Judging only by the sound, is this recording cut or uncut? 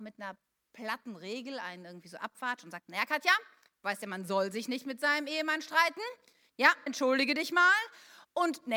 cut